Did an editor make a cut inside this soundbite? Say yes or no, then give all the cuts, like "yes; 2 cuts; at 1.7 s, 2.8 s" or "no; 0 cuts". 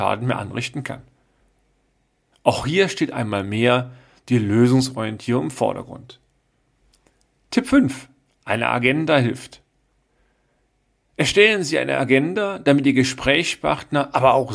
no; 0 cuts